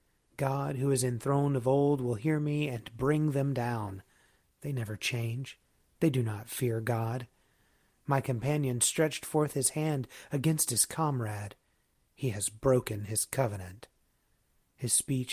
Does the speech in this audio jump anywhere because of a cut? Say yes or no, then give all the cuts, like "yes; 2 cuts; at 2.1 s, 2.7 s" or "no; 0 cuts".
no; 0 cuts